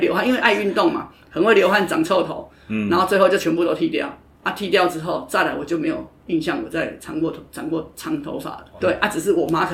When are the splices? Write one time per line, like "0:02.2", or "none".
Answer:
0:08.8